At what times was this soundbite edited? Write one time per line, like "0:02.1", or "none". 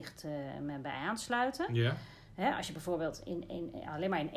none